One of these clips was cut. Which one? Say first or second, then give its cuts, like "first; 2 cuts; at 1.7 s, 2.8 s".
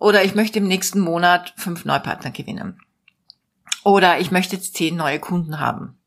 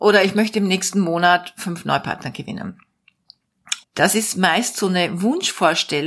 second; 1 cut; at 3.8 s